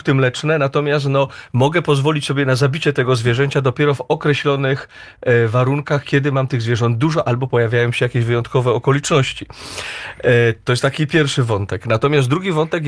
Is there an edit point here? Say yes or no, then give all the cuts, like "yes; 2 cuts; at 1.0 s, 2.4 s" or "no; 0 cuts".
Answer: no; 0 cuts